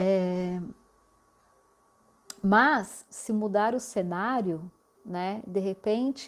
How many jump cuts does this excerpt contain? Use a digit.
1